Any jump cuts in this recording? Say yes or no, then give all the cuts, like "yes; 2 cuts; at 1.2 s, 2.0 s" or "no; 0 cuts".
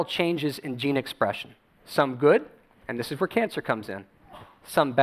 no; 0 cuts